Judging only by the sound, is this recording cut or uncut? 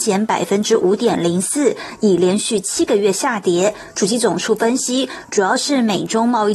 uncut